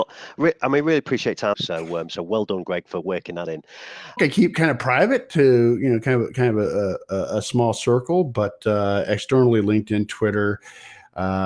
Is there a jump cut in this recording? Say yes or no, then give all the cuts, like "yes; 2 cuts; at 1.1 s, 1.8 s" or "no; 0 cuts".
yes; 2 cuts; at 1.5 s, 4.2 s